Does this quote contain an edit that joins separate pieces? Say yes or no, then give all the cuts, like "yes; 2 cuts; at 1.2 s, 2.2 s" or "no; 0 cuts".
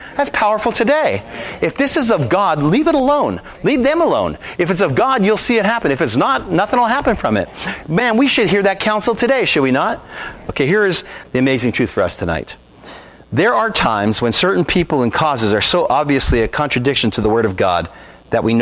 yes; 1 cut; at 10.5 s